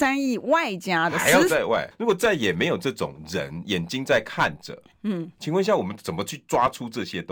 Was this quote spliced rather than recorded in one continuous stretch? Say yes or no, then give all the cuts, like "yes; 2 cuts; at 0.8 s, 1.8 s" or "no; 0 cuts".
yes; 1 cut; at 1.9 s